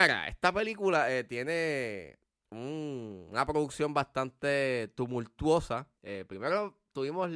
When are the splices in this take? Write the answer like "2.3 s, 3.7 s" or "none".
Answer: 5.9 s